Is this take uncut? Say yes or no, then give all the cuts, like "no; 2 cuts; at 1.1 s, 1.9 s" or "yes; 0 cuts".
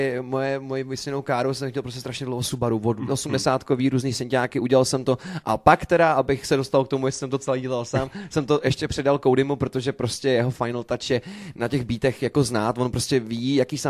no; 1 cut; at 3.1 s